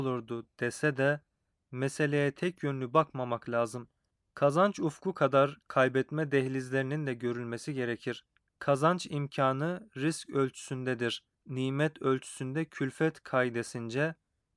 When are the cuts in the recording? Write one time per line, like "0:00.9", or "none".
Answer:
0:08.4
0:11.3